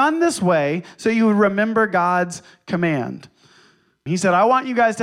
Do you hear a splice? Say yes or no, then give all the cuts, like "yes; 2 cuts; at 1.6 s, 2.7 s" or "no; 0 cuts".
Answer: yes; 1 cut; at 4.1 s